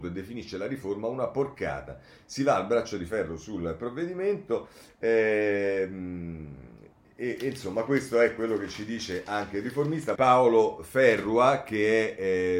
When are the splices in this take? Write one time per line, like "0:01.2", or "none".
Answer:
0:10.2